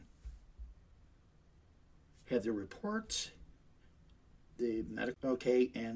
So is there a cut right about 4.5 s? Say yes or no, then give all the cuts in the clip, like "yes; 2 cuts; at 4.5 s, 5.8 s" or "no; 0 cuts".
yes; 1 cut; at 4.5 s